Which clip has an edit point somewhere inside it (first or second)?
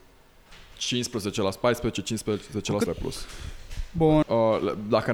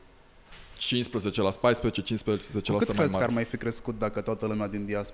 first